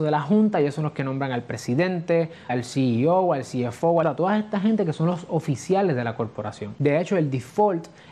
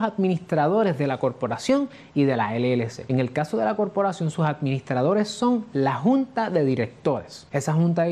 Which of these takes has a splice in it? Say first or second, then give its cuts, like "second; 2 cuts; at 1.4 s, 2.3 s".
first; 3 cuts; at 2.5 s, 4.0 s, 6.8 s